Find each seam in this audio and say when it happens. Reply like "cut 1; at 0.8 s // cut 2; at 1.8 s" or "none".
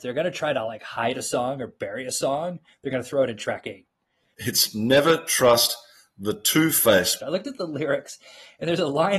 cut 1; at 4.3 s // cut 2; at 7.2 s